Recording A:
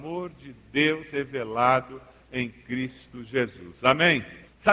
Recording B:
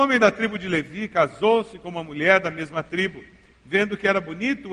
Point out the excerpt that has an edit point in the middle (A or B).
B